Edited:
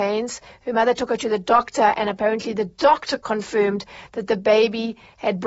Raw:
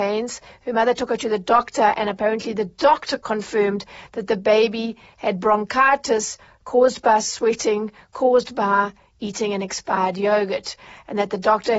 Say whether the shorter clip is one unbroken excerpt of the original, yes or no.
yes